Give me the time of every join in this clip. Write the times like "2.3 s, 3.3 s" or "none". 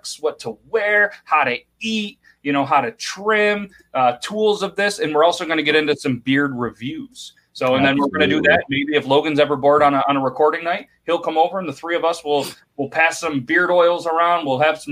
none